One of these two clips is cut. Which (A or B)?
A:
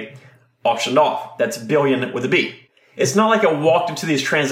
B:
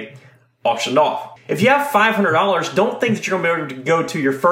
B